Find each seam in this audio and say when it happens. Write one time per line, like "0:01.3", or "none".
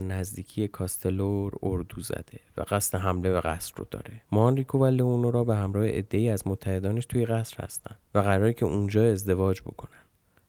0:04.2
0:08.1